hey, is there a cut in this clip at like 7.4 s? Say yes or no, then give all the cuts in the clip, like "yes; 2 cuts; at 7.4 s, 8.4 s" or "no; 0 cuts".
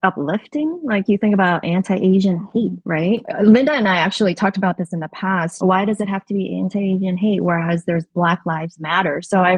no; 2 cuts; at 3.2 s, 5.6 s